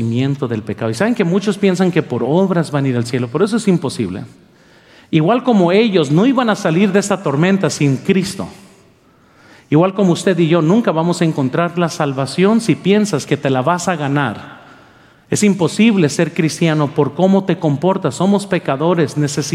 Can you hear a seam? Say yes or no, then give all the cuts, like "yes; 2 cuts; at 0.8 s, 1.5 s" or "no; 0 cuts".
no; 0 cuts